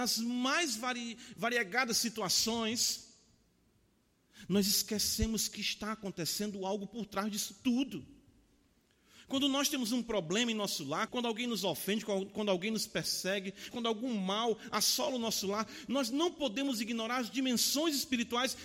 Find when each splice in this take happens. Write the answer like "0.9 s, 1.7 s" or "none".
11.1 s, 13.7 s